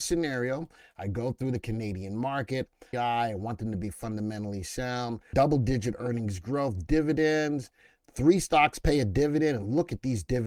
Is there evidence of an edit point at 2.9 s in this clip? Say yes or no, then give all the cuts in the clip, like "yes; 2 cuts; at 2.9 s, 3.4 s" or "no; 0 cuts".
yes; 2 cuts; at 2.9 s, 5.3 s